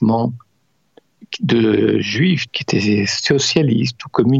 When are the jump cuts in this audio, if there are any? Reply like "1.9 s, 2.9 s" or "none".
2.5 s